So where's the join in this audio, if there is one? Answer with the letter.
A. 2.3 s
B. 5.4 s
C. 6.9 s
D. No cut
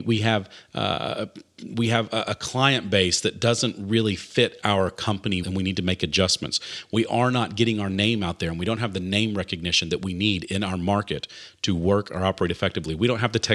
B